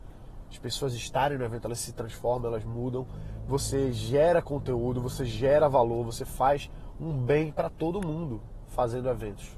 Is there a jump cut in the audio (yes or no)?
no